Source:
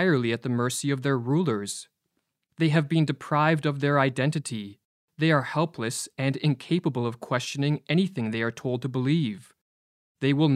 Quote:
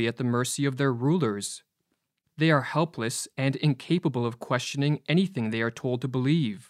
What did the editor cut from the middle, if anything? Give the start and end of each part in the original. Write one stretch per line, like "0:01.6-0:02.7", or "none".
0:02.5-0:05.1